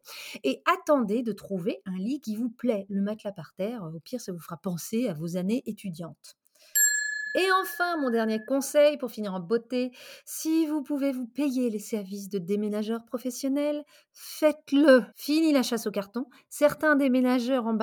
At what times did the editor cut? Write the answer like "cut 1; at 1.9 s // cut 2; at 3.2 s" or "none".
cut 1; at 15.1 s